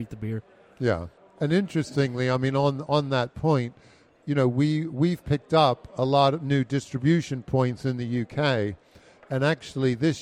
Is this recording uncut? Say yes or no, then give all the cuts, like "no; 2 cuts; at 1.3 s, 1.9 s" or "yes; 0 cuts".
yes; 0 cuts